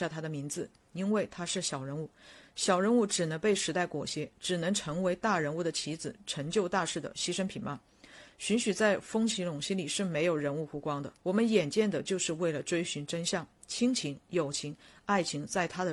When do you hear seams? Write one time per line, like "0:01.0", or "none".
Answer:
0:11.2